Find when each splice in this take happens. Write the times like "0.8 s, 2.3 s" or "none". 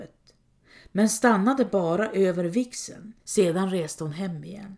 3.2 s